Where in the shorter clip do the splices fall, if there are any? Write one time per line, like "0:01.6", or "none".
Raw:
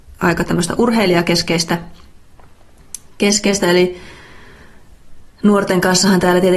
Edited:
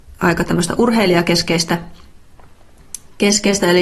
none